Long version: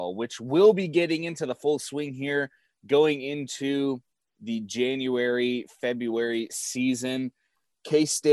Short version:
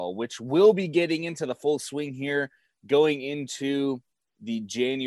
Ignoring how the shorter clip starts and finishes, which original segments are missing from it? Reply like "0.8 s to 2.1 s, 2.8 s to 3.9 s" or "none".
none